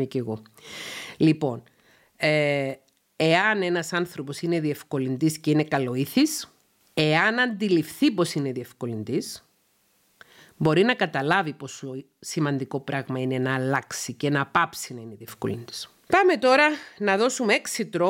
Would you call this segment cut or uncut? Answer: uncut